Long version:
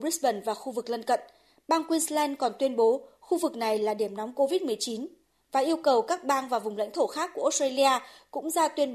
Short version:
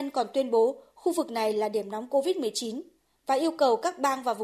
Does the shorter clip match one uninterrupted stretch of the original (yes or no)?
yes